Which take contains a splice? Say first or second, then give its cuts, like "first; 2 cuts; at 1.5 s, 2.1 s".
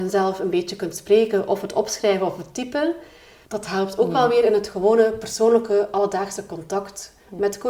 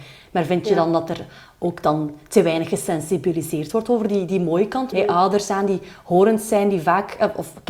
second; 1 cut; at 4.9 s